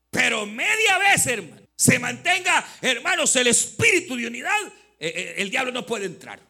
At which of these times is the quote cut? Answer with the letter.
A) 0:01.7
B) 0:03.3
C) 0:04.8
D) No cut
A